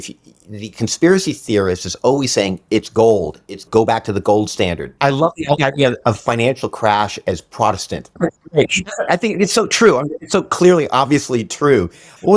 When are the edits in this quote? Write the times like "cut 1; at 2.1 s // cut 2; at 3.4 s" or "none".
cut 1; at 5.0 s